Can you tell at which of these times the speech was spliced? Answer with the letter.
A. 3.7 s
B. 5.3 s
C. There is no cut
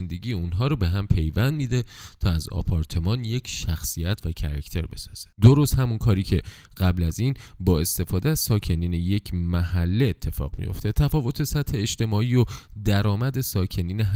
B